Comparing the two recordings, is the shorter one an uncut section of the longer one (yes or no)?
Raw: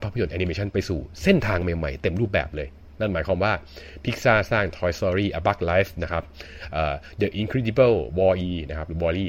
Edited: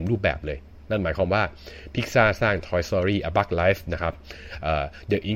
yes